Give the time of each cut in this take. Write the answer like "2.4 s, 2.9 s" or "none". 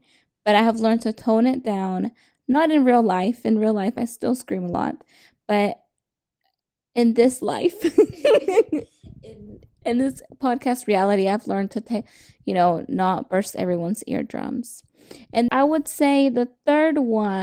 9.8 s, 15.5 s

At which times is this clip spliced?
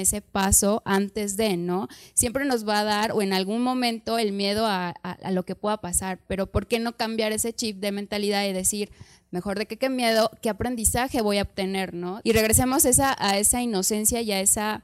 12.2 s

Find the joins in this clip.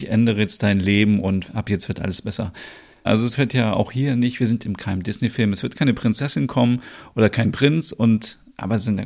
3.1 s

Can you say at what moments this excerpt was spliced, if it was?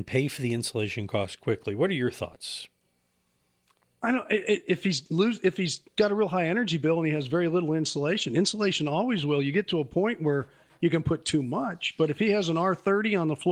none

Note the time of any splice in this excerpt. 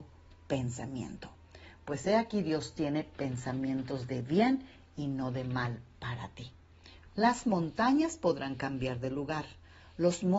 7.1 s

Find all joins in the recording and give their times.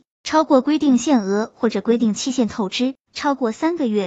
3.1 s

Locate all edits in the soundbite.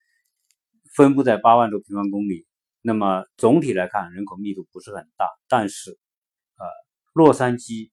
6.5 s

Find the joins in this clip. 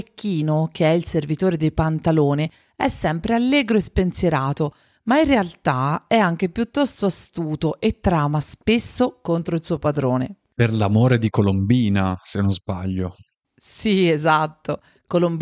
none

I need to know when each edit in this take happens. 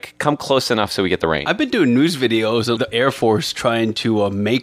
2.8 s

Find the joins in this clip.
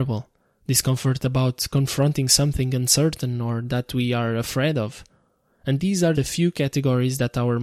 6.1 s

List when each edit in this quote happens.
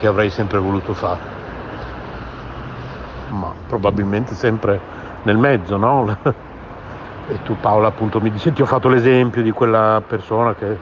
3.3 s, 7.3 s

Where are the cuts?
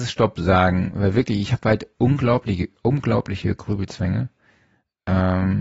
none

